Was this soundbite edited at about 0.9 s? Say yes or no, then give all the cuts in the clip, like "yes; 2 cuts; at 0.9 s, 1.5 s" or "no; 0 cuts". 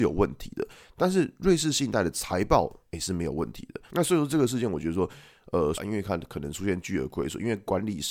no; 2 cuts; at 3.9 s, 5.7 s